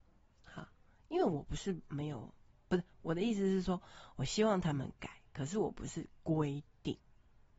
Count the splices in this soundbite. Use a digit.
1